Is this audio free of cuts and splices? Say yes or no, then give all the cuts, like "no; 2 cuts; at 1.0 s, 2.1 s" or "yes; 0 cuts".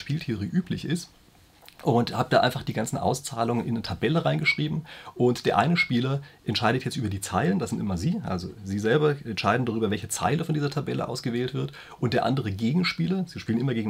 yes; 0 cuts